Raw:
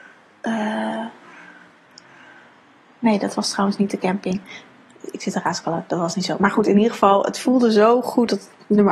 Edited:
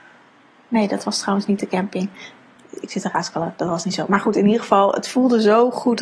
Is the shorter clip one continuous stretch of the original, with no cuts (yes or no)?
yes